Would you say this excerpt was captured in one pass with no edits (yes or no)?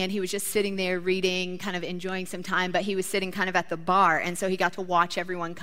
yes